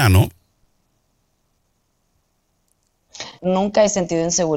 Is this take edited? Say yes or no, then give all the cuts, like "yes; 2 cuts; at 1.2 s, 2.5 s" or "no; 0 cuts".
yes; 1 cut; at 3.4 s